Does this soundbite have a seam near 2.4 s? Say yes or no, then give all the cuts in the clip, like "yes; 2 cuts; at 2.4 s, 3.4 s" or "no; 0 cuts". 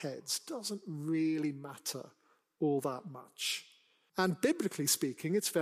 no; 1 cut; at 4.1 s